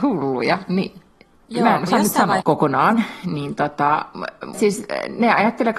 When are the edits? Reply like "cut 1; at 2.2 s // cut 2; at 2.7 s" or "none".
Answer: cut 1; at 2.4 s // cut 2; at 4.5 s